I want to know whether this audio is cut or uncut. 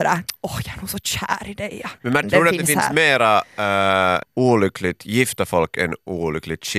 cut